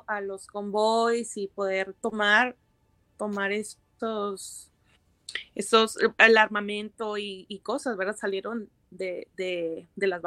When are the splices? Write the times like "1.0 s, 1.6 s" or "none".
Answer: none